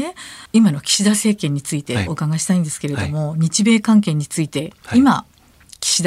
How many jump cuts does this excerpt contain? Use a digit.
0